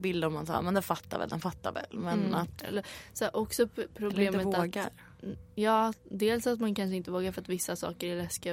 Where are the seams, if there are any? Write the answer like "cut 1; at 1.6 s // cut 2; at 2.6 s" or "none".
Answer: none